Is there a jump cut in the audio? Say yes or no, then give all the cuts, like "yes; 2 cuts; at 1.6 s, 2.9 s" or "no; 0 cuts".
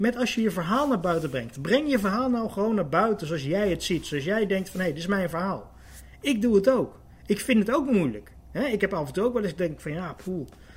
no; 0 cuts